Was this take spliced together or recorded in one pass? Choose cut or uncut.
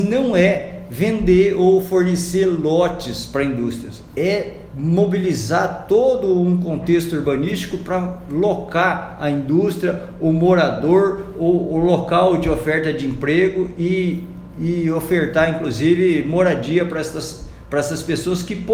uncut